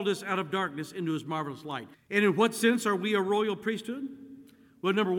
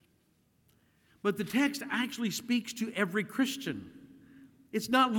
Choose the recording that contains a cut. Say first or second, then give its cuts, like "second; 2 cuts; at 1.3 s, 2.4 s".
first; 1 cut; at 1.9 s